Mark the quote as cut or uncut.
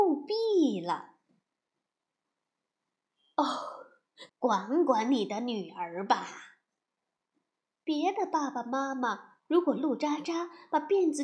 cut